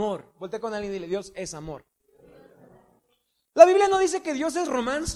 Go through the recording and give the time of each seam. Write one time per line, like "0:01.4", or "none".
none